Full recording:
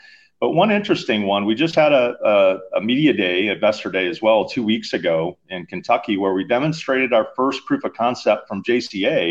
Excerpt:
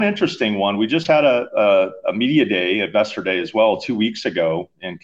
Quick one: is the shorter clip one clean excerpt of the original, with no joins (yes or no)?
yes